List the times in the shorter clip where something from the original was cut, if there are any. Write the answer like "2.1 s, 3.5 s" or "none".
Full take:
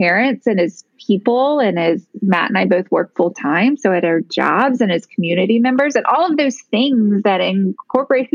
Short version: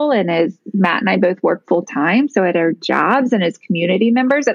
none